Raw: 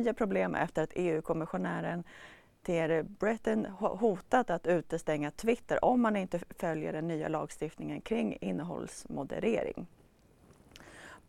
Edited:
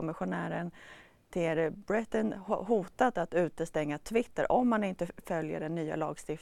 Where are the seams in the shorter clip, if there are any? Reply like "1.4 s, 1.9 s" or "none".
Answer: none